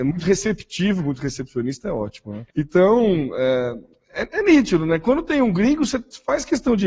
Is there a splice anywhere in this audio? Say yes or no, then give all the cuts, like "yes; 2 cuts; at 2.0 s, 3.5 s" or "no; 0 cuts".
yes; 1 cut; at 2.5 s